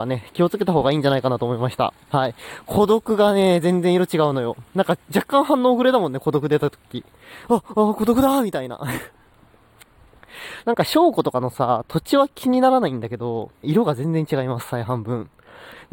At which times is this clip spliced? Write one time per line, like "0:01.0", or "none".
0:10.6
0:13.6